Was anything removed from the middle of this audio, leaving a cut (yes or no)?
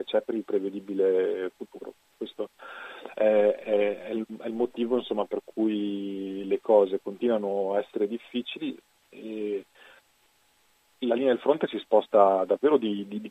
no